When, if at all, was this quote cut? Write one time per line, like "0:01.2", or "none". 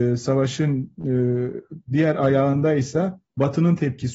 none